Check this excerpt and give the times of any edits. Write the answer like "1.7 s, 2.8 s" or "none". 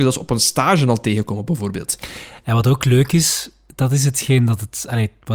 none

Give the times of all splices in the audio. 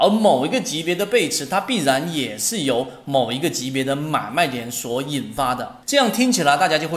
5.8 s

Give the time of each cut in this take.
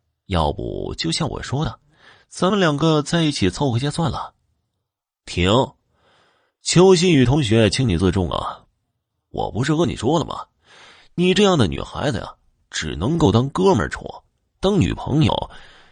9.1 s

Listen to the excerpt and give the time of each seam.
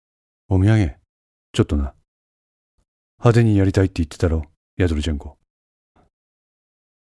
6.0 s

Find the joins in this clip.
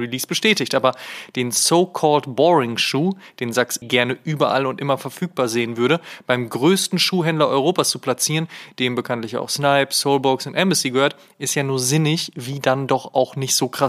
3.8 s

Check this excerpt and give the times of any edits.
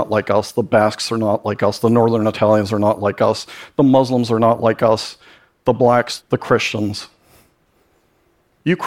6.2 s

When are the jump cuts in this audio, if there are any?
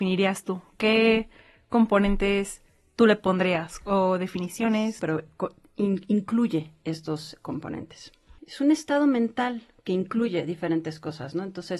5.0 s, 8.4 s

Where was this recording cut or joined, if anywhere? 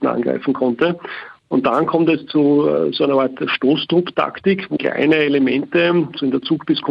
1.4 s, 4.8 s

